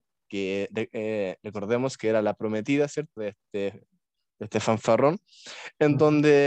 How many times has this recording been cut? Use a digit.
1